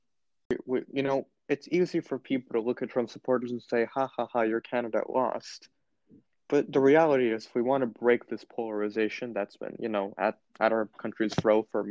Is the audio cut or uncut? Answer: uncut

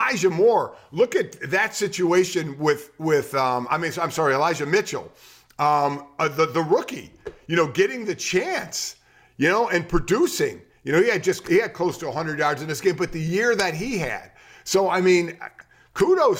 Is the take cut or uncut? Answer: uncut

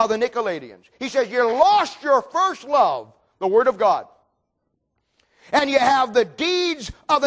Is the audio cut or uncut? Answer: uncut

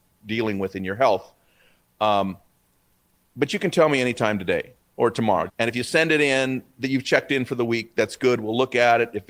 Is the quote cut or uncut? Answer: cut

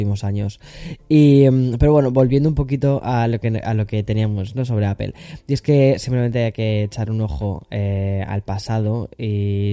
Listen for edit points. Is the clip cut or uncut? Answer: uncut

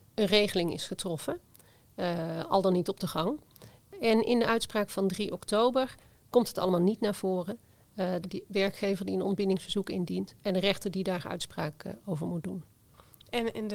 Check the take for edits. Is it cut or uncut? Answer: cut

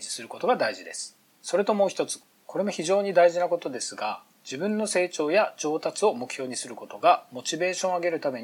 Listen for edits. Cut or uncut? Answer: uncut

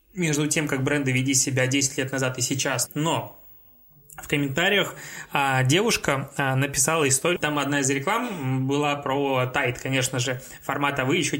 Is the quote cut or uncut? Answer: cut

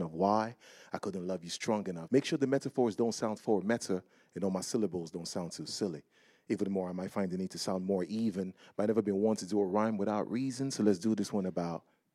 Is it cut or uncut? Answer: cut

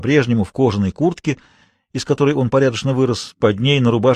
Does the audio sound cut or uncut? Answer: uncut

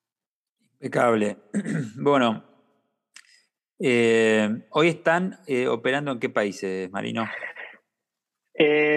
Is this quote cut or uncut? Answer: uncut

